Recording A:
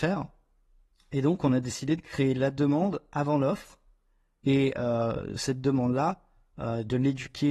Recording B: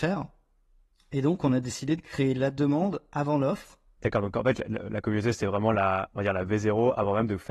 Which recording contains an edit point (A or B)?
B